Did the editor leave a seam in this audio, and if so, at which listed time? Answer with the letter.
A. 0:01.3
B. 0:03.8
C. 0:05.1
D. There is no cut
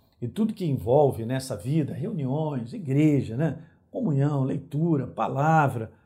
D